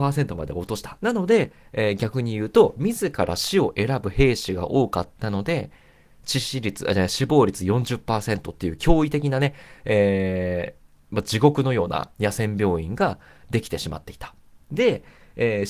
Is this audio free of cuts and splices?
no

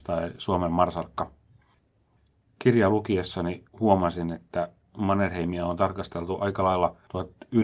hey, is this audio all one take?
yes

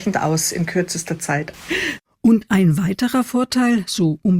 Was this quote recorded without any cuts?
no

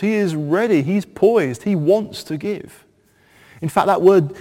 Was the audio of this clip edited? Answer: yes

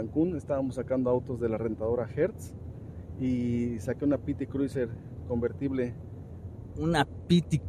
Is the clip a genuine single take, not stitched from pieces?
yes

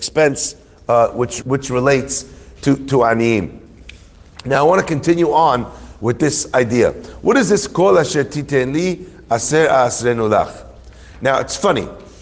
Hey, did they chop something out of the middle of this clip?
yes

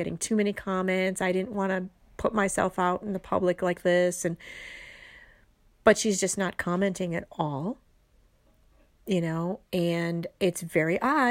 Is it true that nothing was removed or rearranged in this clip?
yes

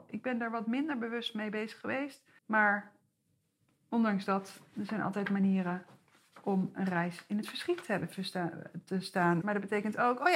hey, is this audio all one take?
no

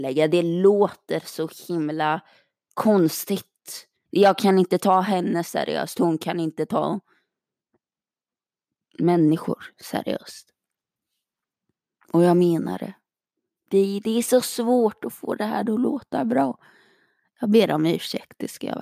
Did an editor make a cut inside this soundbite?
yes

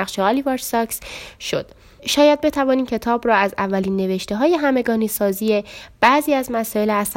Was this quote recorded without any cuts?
no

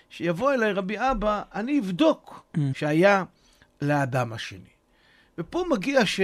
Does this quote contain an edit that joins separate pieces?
yes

